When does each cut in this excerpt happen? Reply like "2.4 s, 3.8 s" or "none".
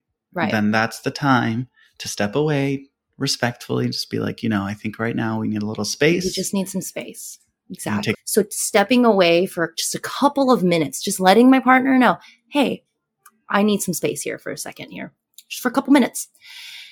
8.1 s